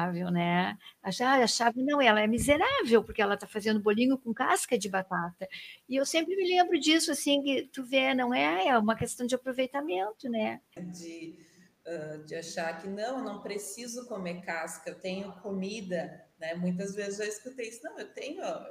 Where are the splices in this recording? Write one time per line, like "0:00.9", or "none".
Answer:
0:10.8